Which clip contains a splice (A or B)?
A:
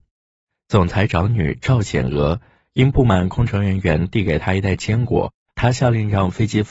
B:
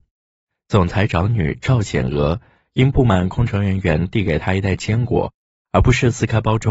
A